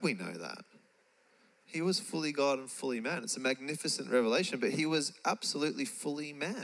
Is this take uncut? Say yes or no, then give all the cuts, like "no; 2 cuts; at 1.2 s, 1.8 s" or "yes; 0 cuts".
yes; 0 cuts